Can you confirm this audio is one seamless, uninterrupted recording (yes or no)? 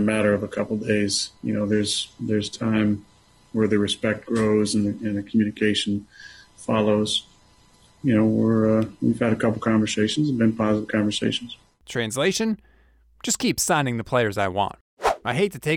yes